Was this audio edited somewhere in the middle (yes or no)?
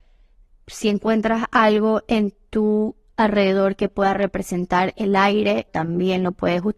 yes